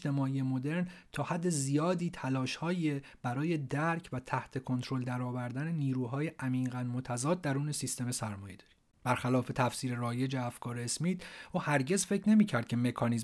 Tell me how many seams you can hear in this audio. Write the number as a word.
one